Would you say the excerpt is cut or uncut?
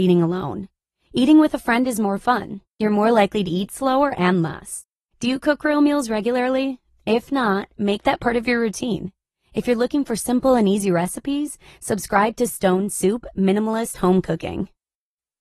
cut